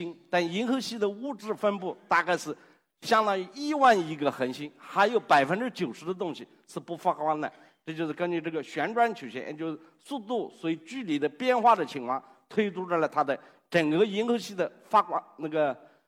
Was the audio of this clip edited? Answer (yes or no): no